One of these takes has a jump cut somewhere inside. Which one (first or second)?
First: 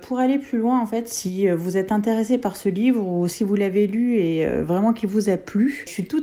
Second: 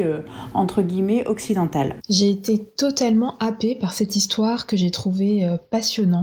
second